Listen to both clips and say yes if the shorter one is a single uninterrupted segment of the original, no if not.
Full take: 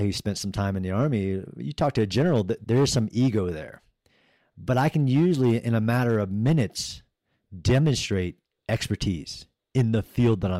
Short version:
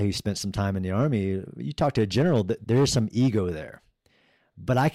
yes